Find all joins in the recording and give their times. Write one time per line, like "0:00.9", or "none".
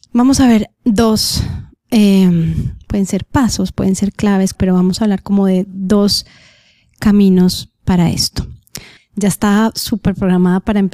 0:04.6
0:09.0